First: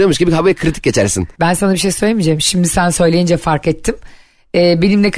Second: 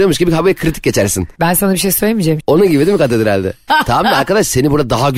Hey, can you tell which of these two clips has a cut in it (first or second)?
second